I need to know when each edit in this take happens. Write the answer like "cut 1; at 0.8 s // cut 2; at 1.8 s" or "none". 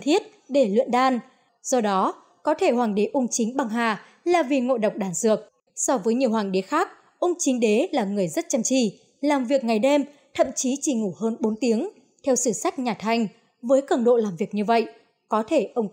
cut 1; at 1.5 s // cut 2; at 5.7 s